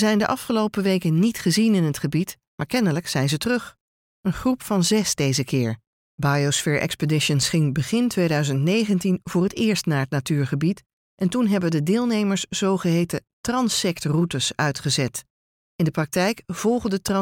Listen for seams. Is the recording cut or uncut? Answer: cut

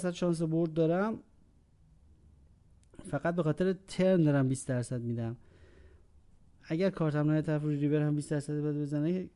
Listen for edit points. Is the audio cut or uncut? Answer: uncut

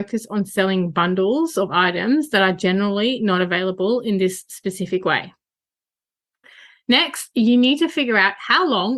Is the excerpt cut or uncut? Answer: uncut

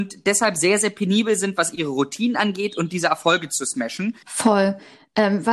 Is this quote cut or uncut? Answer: cut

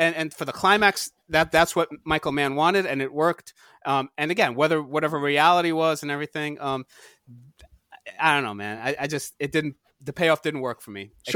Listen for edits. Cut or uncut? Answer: uncut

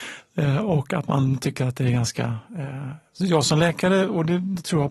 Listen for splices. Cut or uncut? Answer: uncut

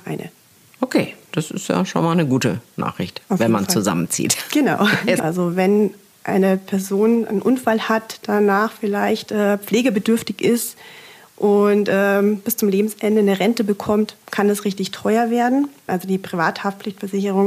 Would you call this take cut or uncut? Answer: cut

